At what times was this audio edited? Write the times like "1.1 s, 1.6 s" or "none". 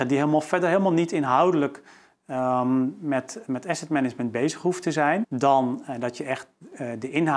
5.2 s

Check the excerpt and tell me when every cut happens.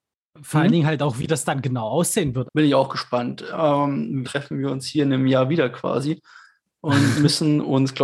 2.5 s, 4.2 s

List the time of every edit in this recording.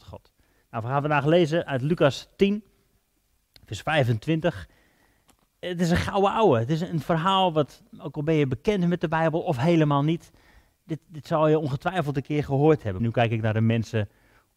13.0 s

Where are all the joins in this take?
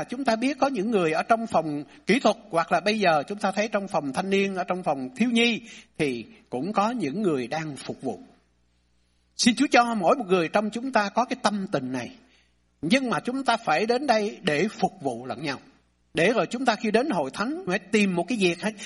12.7 s, 16.0 s, 17.7 s

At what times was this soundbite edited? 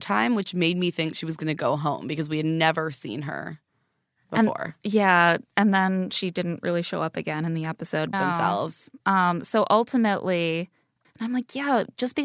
8.1 s, 11.0 s

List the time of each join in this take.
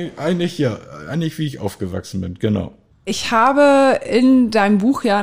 2.9 s

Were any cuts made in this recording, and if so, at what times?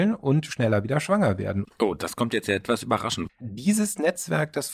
1.6 s, 3.3 s

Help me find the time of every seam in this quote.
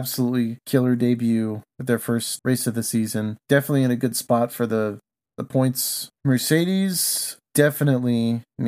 2.4 s

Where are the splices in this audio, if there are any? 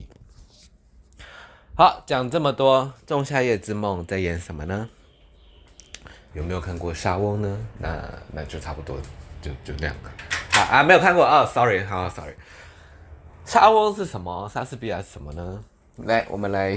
6.3 s

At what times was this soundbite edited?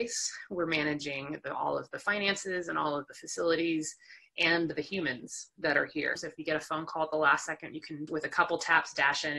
6.2 s, 8.1 s

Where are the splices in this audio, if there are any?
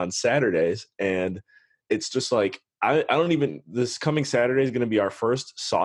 none

